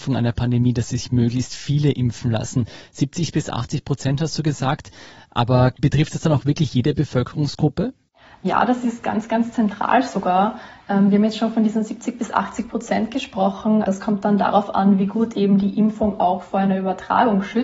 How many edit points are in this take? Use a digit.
0